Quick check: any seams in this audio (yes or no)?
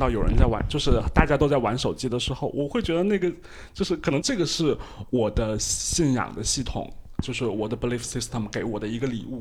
yes